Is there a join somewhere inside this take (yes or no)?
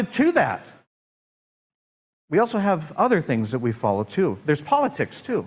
yes